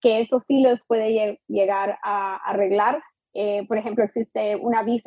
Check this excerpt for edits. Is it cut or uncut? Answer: uncut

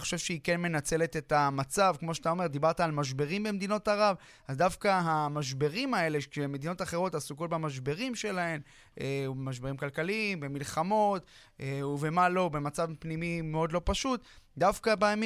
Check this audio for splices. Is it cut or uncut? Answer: uncut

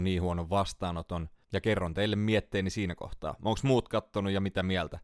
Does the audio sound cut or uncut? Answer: cut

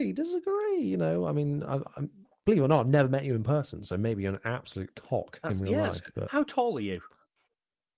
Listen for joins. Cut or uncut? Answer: uncut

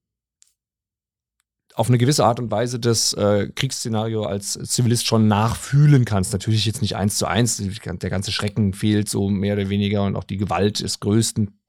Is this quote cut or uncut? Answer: uncut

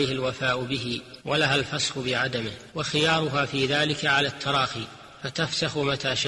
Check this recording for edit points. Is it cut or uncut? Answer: cut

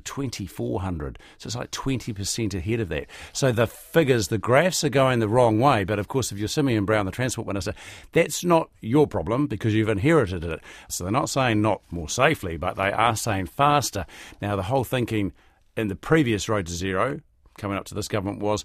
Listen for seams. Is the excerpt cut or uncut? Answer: cut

